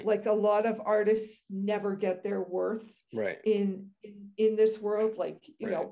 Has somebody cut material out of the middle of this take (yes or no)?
no